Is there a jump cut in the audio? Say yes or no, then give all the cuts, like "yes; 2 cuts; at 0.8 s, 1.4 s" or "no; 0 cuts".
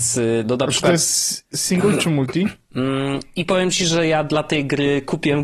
yes; 1 cut; at 2.7 s